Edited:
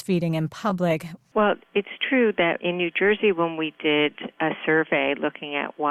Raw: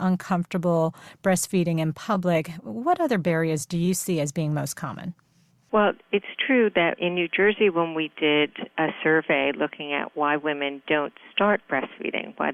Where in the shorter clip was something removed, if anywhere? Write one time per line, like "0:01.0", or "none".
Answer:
0:01.2